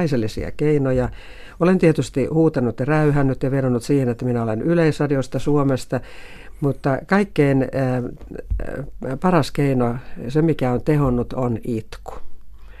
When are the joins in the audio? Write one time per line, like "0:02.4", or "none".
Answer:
none